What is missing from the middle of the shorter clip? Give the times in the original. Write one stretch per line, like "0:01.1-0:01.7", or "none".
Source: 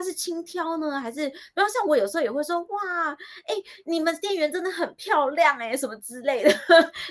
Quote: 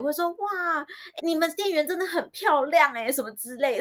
0:03.5-0:03.8